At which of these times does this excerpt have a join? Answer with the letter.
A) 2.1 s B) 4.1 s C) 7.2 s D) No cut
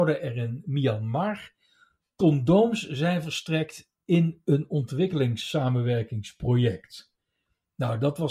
D